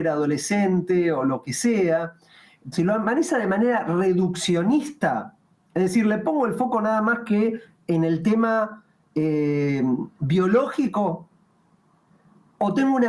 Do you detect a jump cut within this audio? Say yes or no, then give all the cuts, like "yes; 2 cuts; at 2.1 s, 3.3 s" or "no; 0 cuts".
yes; 1 cut; at 2.7 s